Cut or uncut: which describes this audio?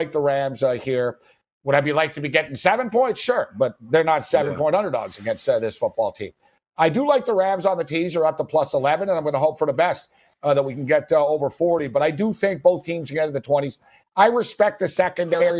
uncut